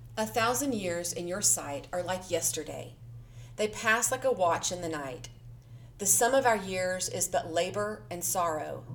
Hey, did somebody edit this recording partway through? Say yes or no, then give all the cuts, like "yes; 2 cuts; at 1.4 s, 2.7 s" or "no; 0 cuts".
no; 0 cuts